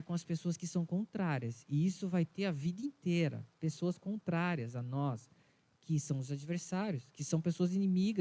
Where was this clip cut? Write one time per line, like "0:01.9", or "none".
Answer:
none